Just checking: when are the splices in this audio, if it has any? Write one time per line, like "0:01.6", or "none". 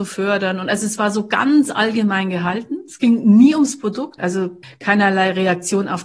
0:04.2

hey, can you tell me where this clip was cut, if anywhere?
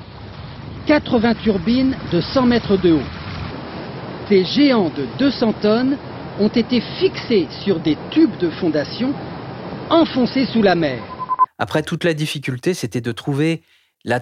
0:04.3
0:11.5

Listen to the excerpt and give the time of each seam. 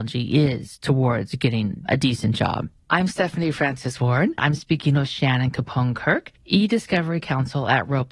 0:02.8
0:04.4
0:06.4

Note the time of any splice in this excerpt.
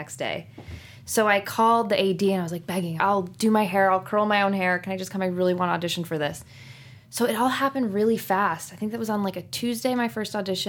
0:03.0

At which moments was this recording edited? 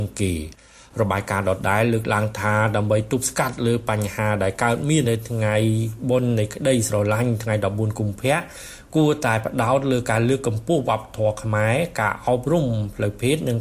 0:05.0

